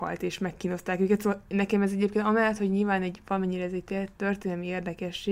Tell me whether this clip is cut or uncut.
uncut